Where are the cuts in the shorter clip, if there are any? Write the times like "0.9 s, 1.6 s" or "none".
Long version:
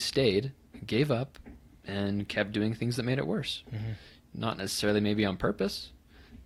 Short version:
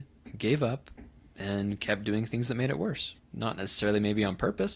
3.1 s